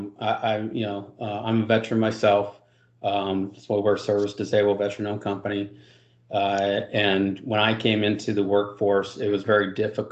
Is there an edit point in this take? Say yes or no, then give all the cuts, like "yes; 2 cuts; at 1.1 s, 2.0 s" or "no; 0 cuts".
no; 0 cuts